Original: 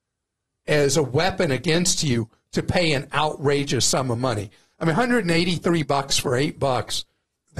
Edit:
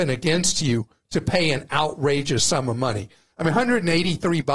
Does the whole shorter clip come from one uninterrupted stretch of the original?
yes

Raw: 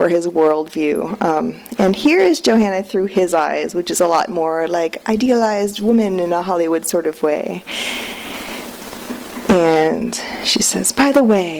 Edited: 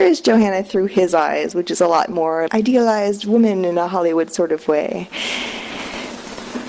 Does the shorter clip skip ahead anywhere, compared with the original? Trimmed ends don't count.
yes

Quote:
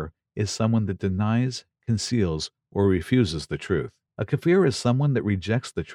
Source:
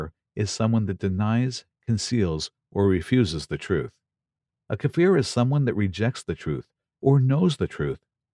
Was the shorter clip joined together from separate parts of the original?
yes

